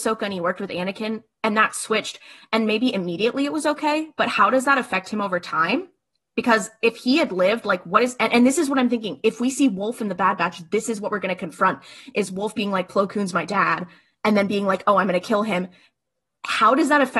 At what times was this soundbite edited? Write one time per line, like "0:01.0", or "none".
none